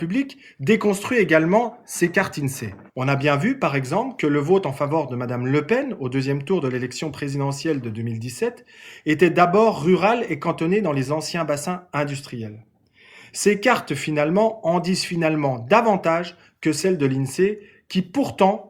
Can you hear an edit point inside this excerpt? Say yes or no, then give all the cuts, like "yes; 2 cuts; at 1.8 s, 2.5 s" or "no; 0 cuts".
yes; 1 cut; at 2.9 s